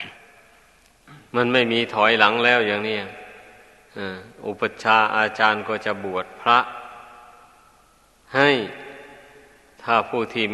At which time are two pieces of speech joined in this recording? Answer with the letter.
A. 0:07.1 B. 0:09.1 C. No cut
C